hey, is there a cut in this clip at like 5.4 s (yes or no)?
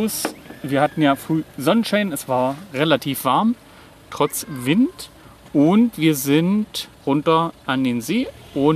no